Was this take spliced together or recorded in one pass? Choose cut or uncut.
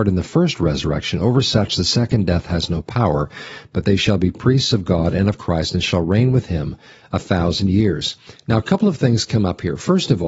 uncut